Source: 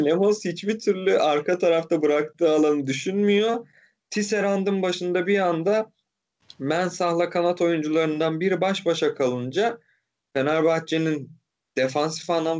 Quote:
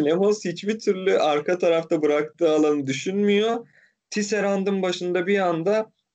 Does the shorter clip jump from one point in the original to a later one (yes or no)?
no